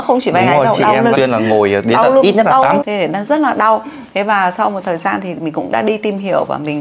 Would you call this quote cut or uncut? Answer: cut